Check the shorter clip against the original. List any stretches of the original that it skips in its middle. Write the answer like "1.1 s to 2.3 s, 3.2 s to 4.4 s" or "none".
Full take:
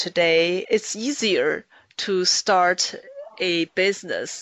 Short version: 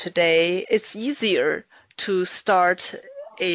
none